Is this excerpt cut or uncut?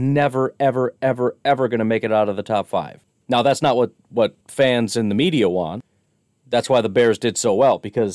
cut